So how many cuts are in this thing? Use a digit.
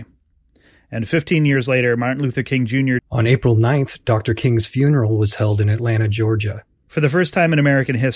2